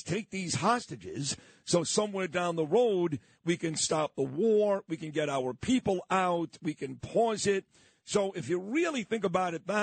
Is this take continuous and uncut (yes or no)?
yes